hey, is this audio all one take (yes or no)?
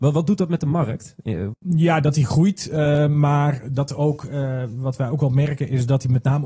no